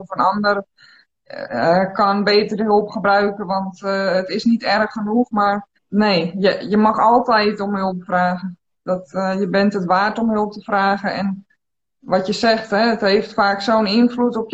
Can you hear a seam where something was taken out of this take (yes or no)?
yes